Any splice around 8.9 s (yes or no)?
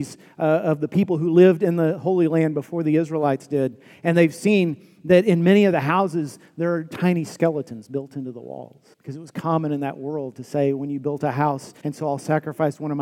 yes